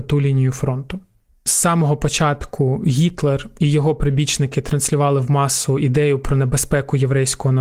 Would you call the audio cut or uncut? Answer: uncut